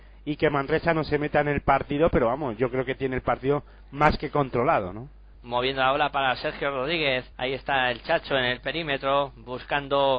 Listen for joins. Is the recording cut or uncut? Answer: cut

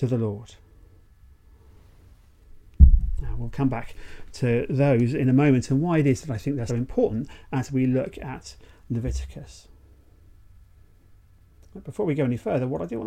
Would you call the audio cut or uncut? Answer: cut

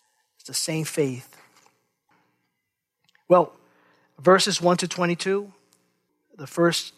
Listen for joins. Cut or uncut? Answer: uncut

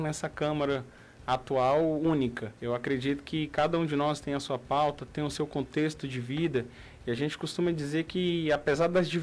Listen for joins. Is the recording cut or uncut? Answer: cut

